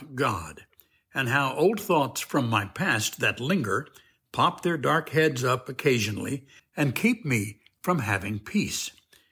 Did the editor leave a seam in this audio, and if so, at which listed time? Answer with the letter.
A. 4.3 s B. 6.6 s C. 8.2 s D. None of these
B